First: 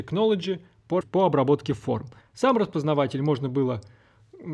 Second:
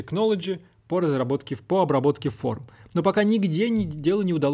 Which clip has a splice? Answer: first; 2 cuts; at 1.0 s, 2.2 s

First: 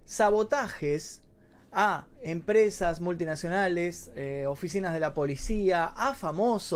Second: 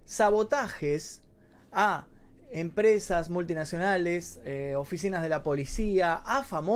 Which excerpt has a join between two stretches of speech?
first; 1 cut; at 2.1 s

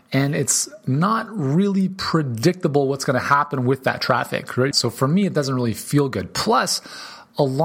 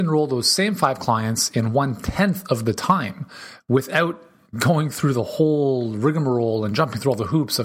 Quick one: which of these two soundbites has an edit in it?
first; 1 cut; at 4.7 s

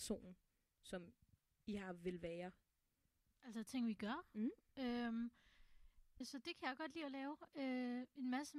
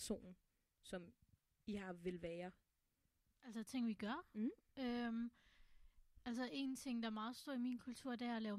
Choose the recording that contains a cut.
first; 1 cut; at 6.2 s

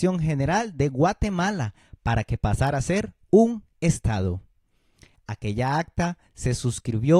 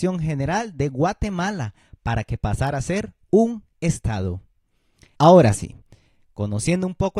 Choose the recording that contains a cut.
second; 1 cut; at 5.1 s

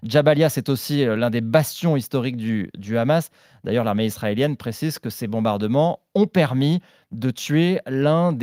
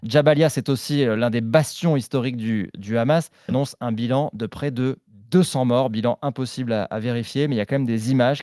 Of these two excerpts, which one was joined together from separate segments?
second; 1 cut; at 3.5 s

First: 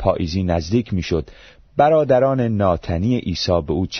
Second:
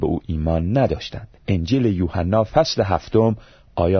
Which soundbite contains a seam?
second; 1 cut; at 1.4 s

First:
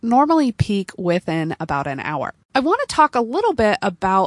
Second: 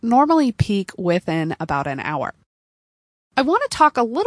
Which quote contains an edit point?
first; 1 cut; at 2.4 s

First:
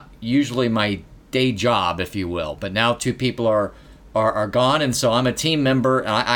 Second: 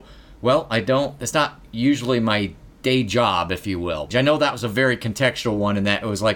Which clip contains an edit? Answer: second; 1 cut; at 4.1 s

